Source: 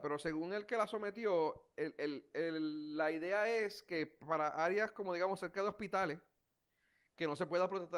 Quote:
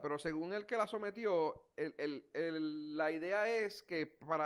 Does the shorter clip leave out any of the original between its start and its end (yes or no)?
no